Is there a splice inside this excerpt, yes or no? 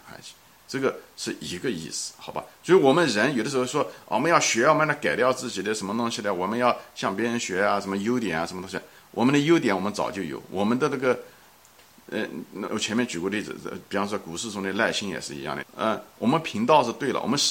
yes